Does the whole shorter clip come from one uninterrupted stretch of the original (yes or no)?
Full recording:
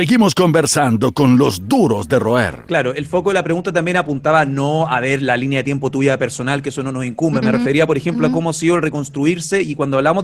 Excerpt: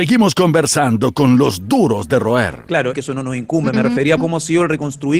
no